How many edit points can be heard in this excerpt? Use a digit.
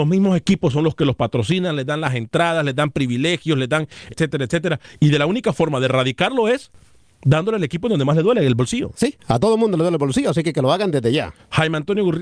1